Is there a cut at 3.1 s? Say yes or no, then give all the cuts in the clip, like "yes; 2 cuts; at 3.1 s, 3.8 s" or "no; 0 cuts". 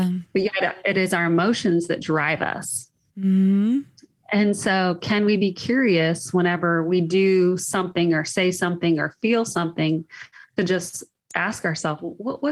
no; 0 cuts